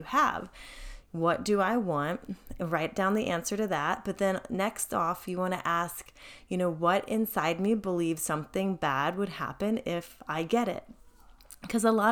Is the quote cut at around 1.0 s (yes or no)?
yes